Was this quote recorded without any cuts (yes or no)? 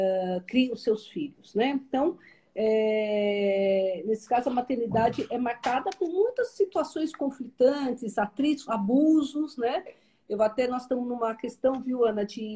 no